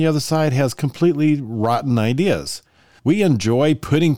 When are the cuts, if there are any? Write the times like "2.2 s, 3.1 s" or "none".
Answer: 3.0 s